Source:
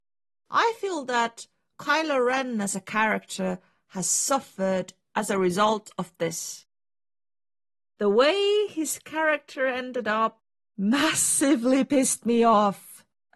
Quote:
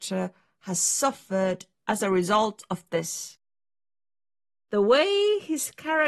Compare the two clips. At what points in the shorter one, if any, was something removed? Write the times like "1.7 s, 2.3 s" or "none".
none